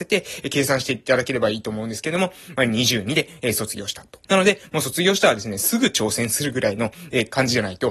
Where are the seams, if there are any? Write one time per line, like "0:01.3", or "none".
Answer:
0:04.2